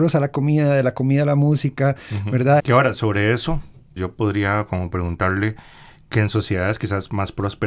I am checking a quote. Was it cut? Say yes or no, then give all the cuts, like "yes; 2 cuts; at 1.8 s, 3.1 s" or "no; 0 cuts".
yes; 2 cuts; at 2.6 s, 4.0 s